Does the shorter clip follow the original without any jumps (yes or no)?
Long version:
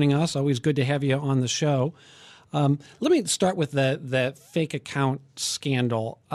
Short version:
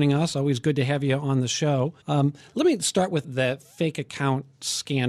no